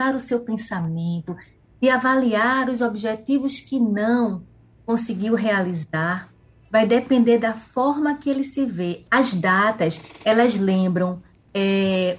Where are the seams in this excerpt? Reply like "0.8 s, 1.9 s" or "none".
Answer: 9.0 s